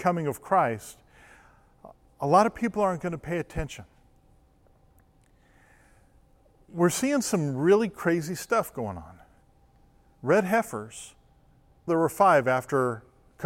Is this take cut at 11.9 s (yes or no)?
yes